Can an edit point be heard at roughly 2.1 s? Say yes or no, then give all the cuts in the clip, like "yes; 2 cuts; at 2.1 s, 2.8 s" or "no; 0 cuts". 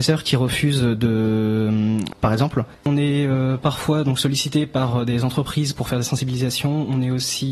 yes; 1 cut; at 2.1 s